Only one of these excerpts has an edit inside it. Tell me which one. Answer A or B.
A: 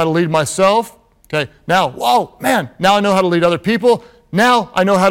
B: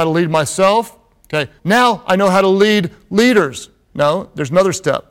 B